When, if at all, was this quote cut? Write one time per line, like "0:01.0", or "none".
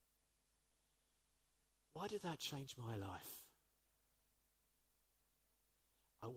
none